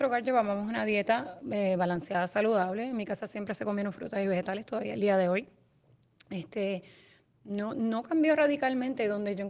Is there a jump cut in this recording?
no; 0 cuts

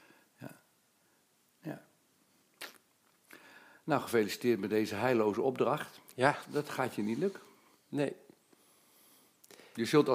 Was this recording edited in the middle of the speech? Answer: no; 0 cuts

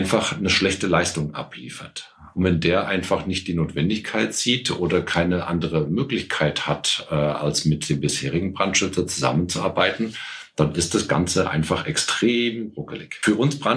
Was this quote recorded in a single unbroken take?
no; 1 cut; at 2.3 s

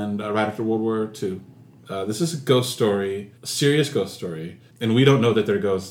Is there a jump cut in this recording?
yes; 3 cuts; at 1.8 s, 3.4 s, 4.7 s

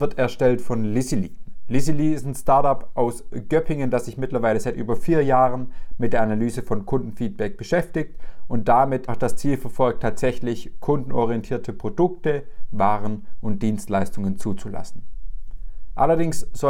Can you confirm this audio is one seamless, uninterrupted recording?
no; 1 cut; at 9.1 s

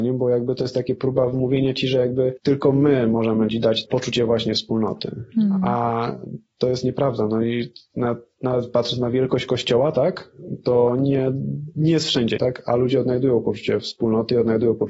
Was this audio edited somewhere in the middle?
yes; 1 cut; at 12.4 s

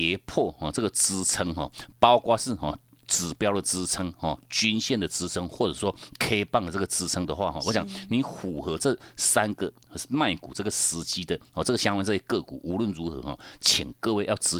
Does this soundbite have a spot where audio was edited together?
no; 0 cuts

